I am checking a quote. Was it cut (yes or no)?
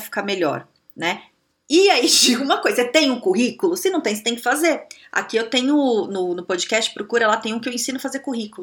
no